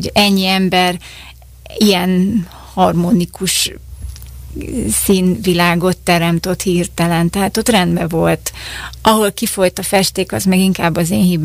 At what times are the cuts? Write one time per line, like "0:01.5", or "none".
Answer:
none